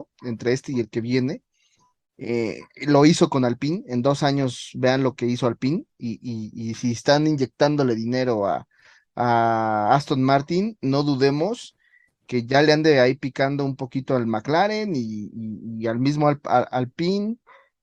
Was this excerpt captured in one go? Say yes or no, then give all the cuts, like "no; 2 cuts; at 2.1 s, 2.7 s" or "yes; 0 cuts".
yes; 0 cuts